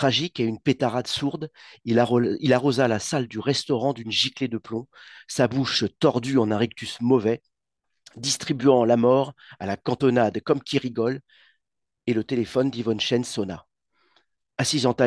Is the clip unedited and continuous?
yes; 0 cuts

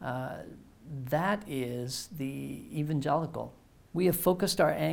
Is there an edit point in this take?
yes; 1 cut; at 3.8 s

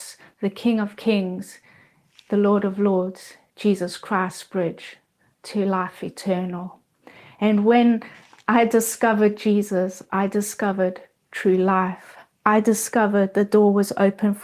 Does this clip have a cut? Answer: no; 0 cuts

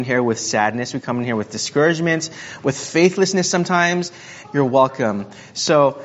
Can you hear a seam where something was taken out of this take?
yes; 1 cut; at 4.4 s

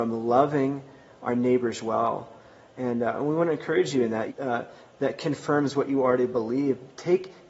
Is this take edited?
yes; 1 cut; at 4.3 s

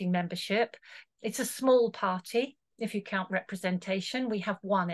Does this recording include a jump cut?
yes; 1 cut; at 1.1 s

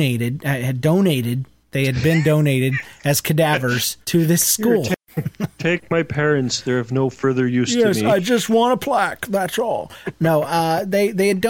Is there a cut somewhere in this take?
yes; 1 cut; at 4.0 s

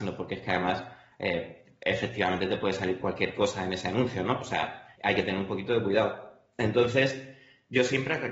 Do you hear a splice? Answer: yes; 1 cut; at 4.9 s

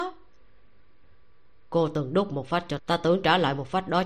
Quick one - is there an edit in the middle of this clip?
yes; 1 cut; at 2.8 s

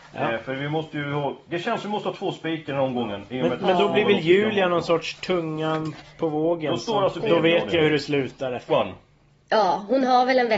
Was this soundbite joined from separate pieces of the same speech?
yes; 2 cuts; at 7.2 s, 8.7 s

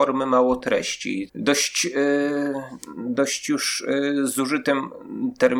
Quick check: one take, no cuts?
no; 1 cut; at 1.3 s

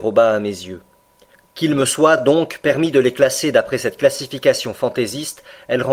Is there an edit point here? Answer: no; 0 cuts

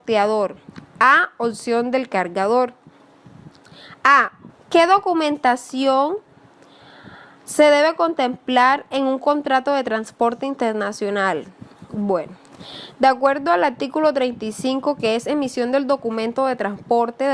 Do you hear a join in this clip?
yes; 1 cut; at 4.5 s

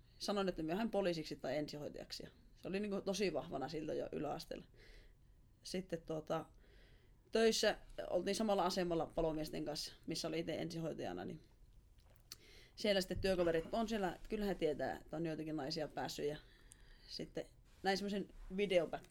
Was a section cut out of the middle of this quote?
yes; 2 cuts; at 13.6 s, 17.6 s

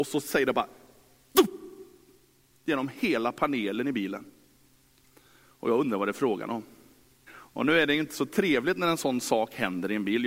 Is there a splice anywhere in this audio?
yes; 1 cut; at 7.3 s

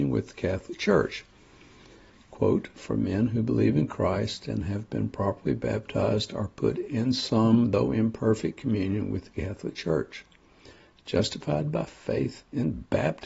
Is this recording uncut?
yes; 0 cuts

